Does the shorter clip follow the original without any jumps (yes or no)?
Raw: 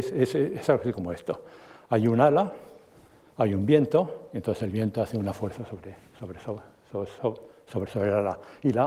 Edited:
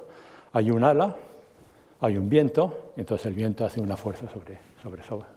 yes